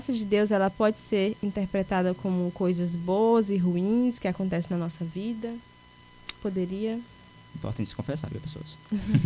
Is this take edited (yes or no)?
yes